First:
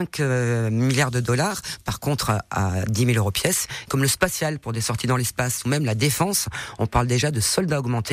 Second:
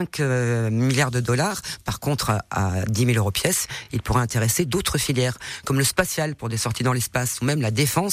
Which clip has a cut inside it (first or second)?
first